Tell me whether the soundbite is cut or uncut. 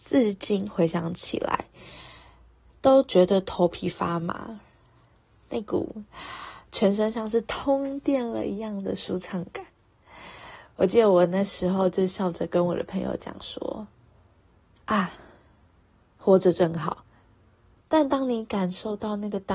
cut